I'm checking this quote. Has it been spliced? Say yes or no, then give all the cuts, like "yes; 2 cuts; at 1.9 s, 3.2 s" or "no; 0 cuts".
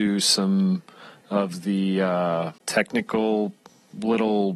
yes; 1 cut; at 2.6 s